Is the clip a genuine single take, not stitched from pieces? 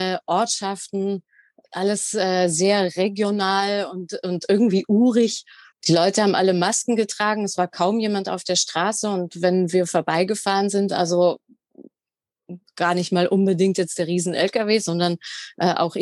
no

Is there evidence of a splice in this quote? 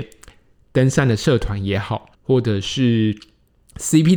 yes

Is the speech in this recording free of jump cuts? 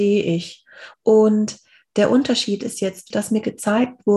no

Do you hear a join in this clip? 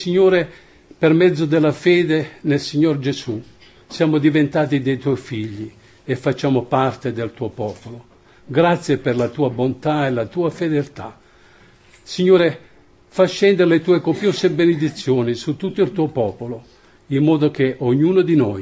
no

